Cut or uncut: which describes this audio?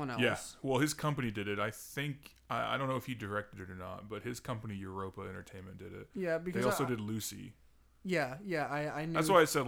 uncut